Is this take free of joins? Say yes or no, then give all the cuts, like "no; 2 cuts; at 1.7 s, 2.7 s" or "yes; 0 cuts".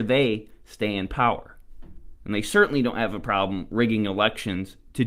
yes; 0 cuts